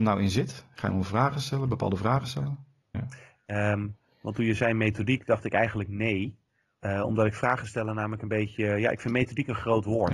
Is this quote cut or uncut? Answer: cut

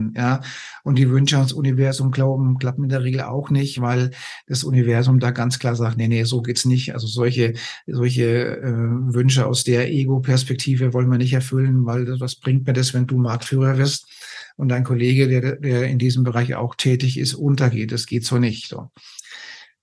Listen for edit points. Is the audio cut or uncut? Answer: uncut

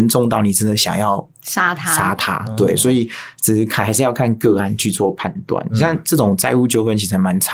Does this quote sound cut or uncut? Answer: uncut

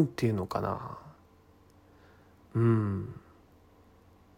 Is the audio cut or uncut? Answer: uncut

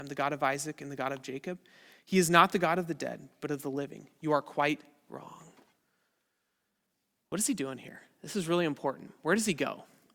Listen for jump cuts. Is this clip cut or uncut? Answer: uncut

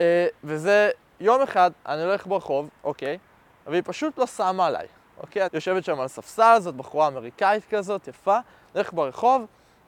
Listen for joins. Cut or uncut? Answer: cut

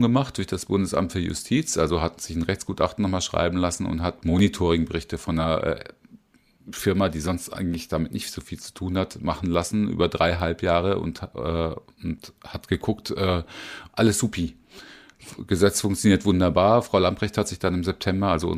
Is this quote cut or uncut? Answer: cut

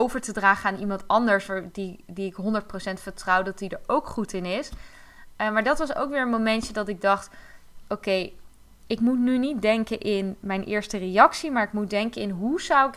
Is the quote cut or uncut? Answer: uncut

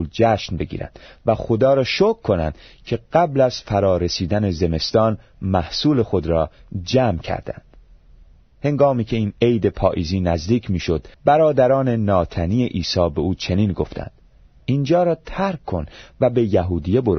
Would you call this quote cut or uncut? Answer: cut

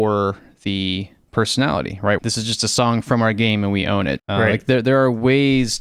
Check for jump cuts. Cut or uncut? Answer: cut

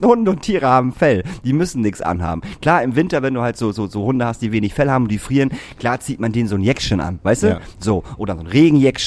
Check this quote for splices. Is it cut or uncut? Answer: uncut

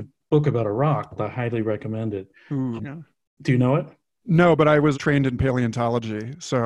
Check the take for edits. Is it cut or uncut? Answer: cut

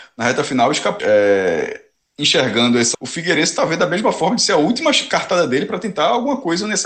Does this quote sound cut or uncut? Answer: cut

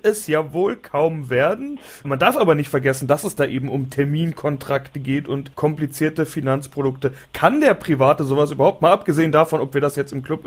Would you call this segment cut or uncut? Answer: uncut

